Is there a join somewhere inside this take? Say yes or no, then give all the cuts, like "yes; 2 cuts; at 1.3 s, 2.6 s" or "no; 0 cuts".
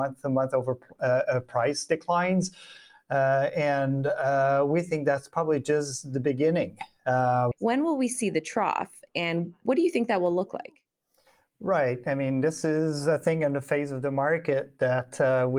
yes; 1 cut; at 7.5 s